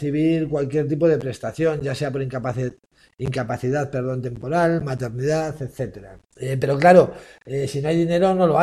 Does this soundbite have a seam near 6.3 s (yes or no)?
yes